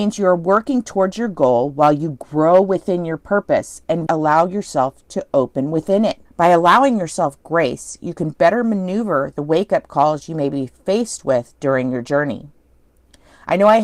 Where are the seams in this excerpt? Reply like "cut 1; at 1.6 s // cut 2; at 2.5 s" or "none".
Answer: cut 1; at 4.1 s // cut 2; at 6.3 s